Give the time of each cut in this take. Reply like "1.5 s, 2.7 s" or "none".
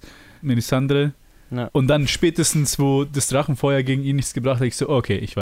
1.7 s